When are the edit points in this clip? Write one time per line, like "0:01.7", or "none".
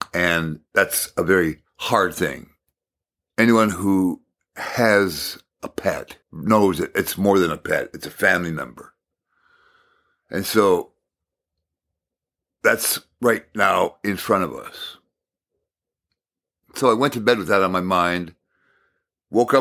0:01.7
0:06.2